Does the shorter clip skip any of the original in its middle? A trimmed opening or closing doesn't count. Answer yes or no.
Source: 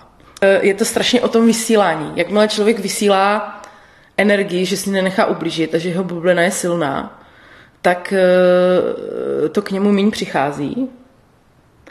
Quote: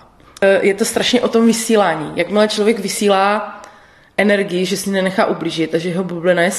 no